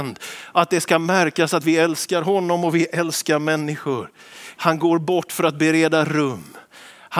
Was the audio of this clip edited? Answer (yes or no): yes